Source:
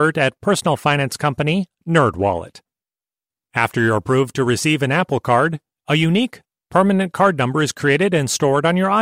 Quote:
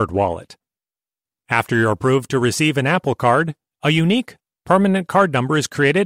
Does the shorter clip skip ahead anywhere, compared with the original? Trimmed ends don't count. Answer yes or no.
no